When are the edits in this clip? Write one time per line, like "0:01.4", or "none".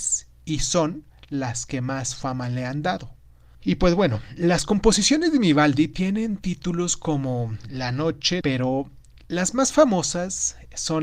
0:03.5
0:08.4